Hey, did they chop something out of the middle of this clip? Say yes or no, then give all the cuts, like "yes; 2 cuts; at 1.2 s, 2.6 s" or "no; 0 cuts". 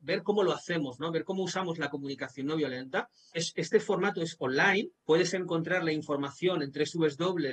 yes; 2 cuts; at 3.3 s, 5.0 s